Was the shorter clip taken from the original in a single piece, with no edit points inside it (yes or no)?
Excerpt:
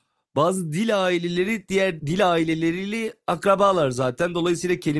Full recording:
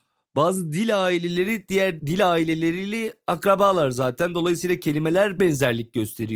yes